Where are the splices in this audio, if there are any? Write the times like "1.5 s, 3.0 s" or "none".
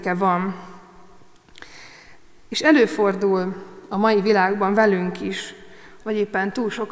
2.4 s, 6.0 s